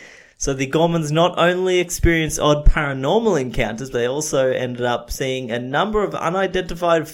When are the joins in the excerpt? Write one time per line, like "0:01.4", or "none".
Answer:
none